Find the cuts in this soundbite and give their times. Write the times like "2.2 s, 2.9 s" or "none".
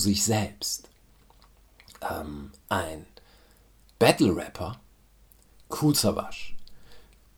none